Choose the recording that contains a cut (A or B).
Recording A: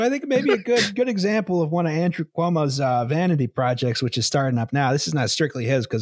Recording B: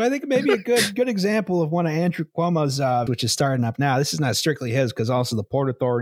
B